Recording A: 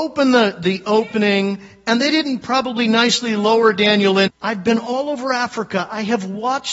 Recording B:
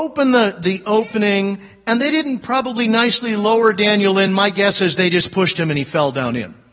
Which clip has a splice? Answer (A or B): A